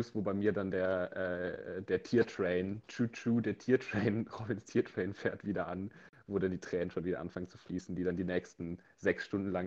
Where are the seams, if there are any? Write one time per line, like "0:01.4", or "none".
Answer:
none